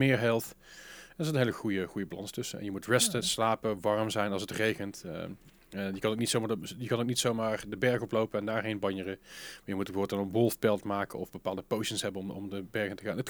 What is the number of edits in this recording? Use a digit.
0